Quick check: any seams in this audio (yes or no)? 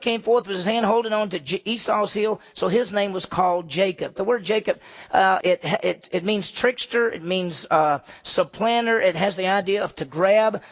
yes